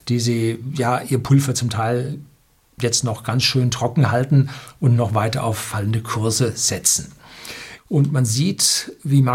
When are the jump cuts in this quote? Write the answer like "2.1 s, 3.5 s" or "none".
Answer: 7.8 s